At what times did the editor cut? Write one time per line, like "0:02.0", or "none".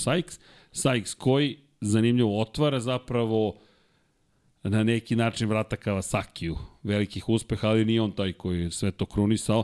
none